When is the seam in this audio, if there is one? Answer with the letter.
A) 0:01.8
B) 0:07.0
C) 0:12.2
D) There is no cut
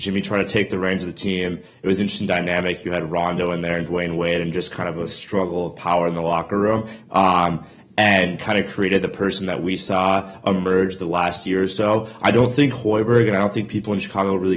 B